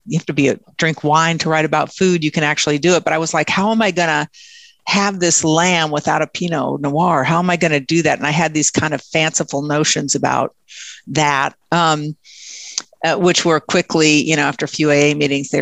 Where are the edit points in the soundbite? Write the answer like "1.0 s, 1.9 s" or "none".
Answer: none